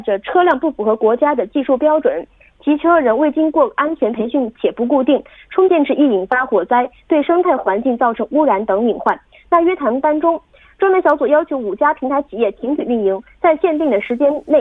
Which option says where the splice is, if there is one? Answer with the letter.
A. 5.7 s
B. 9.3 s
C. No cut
A